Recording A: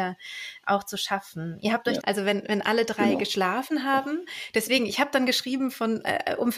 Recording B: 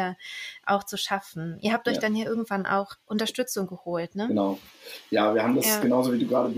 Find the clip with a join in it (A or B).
A